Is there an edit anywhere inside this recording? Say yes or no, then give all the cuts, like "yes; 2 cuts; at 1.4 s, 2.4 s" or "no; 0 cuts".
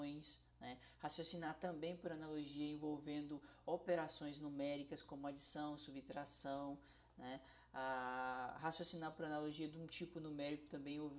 no; 0 cuts